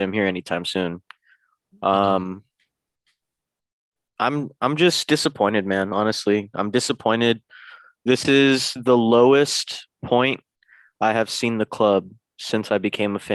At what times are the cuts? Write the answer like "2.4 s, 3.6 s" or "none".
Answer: none